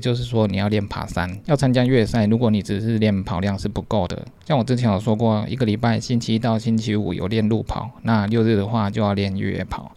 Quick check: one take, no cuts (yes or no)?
yes